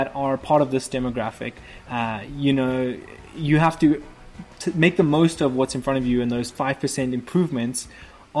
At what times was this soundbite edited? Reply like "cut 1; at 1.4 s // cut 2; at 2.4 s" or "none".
cut 1; at 1.8 s